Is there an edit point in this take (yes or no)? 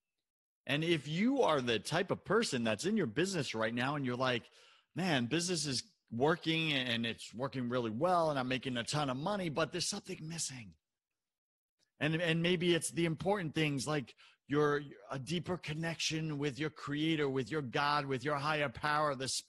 no